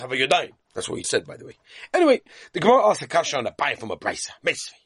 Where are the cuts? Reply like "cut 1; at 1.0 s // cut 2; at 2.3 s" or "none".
cut 1; at 1.0 s

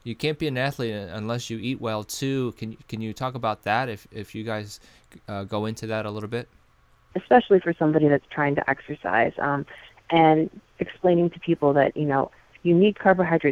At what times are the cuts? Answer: cut 1; at 7.1 s

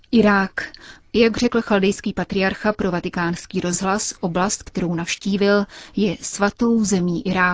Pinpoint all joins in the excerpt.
cut 1; at 1.0 s

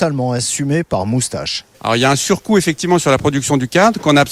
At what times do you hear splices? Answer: cut 1; at 1.7 s

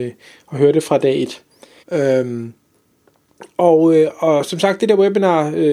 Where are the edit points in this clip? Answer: cut 1; at 1.8 s

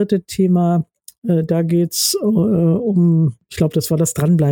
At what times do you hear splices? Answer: none

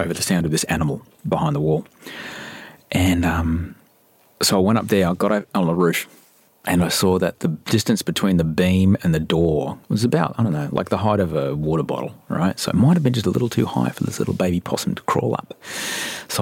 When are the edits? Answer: none

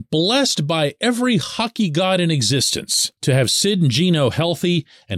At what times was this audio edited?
cut 1; at 3.2 s

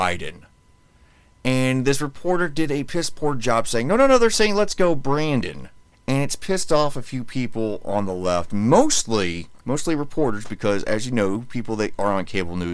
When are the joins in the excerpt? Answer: cut 1; at 5.9 s // cut 2; at 9.6 s

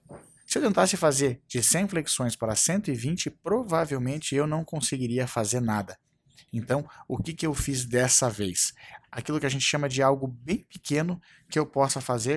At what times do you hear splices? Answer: cut 1; at 9.0 s

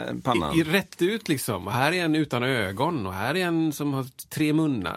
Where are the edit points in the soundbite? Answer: none

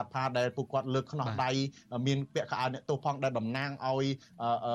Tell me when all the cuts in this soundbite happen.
none

